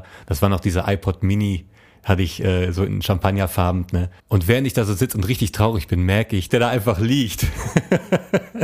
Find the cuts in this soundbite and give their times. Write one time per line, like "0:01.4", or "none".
0:04.2
0:06.5